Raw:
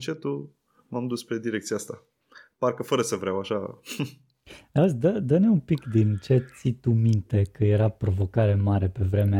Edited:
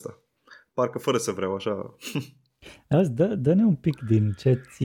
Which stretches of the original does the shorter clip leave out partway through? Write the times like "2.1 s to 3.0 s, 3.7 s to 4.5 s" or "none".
none